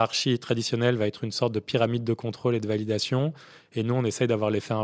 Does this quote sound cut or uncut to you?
uncut